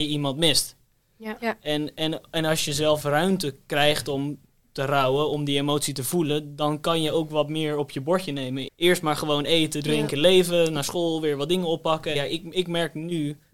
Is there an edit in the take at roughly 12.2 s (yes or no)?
yes